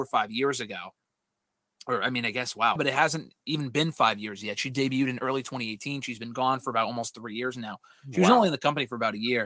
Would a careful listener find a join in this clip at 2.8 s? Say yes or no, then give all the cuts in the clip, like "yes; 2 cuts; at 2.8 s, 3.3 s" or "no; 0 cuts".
yes; 1 cut; at 2.8 s